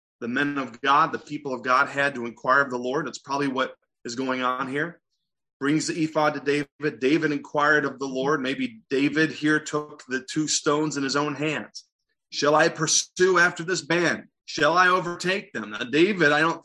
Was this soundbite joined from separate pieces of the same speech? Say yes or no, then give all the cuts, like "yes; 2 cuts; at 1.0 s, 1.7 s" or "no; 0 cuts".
no; 0 cuts